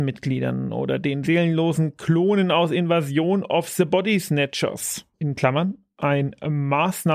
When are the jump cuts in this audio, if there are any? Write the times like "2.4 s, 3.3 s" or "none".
5.1 s